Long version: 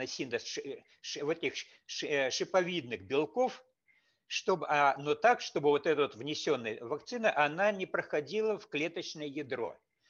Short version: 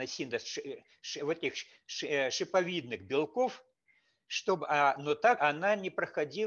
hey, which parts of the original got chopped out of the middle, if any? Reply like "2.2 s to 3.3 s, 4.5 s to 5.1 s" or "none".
5.4 s to 7.3 s